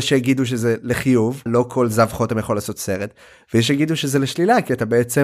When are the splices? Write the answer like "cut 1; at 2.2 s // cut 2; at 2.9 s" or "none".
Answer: cut 1; at 1.5 s

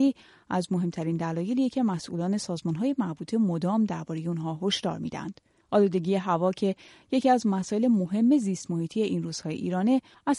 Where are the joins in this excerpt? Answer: none

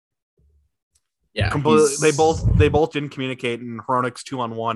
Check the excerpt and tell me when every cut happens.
cut 1; at 2.9 s

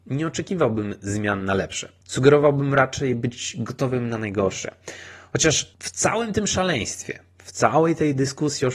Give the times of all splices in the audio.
none

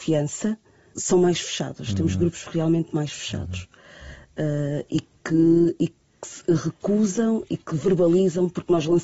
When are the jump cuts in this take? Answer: cut 1; at 0.9 s

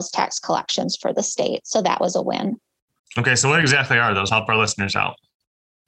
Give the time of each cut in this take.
cut 1; at 3.0 s // cut 2; at 4.3 s

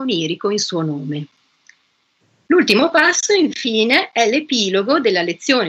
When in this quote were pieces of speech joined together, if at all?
none

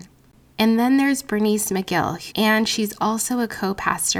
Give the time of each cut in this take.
cut 1; at 2.3 s

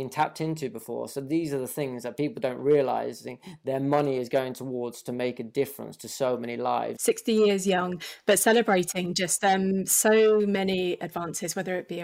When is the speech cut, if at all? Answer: cut 1; at 7.0 s

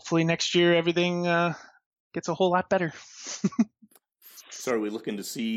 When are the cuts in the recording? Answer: none

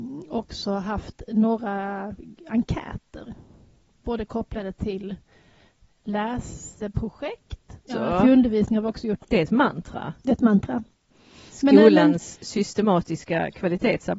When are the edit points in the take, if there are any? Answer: cut 1; at 7.9 s // cut 2; at 9.2 s

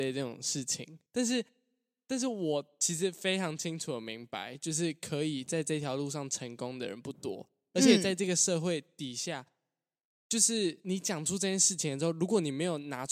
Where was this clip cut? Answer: cut 1; at 1.1 s

